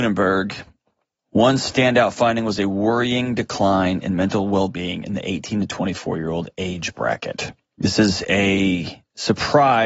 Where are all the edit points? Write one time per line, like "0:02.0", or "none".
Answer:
0:01.2